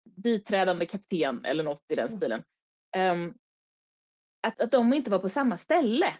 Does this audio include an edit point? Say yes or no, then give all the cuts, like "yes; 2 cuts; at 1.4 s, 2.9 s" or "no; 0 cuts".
yes; 1 cut; at 4.5 s